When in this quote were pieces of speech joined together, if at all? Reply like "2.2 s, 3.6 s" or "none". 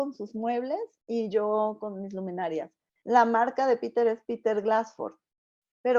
3.0 s